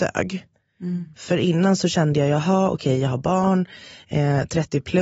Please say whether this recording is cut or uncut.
uncut